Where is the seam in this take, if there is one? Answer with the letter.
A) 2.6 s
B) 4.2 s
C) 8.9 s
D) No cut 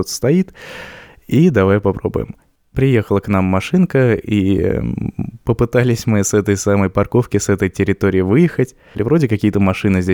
C